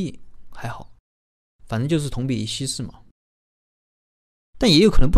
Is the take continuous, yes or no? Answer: yes